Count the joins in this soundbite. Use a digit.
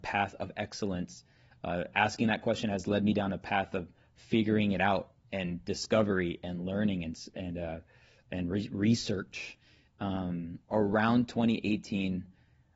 1